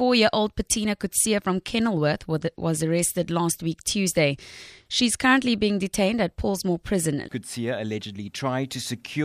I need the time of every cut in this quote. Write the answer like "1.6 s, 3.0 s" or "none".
7.2 s